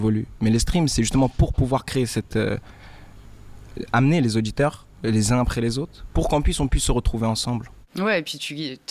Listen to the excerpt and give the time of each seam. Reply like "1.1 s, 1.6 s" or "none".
none